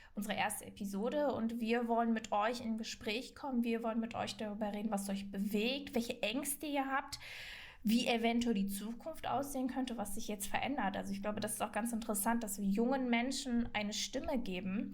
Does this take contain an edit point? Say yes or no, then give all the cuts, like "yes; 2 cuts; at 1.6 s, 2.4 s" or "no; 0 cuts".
yes; 1 cut; at 5.9 s